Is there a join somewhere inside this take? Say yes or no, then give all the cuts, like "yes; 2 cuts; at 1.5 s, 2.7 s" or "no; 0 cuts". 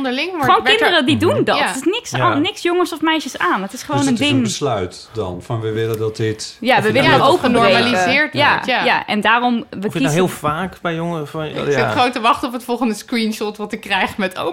yes; 2 cuts; at 7.2 s, 11.5 s